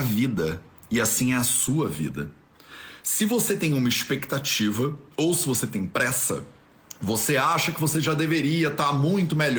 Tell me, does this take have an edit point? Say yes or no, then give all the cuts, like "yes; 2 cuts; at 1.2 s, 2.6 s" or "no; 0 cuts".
yes; 1 cut; at 5.1 s